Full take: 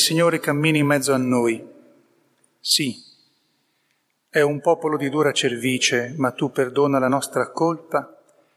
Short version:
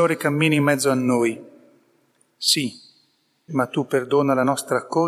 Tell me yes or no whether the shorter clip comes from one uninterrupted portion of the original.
no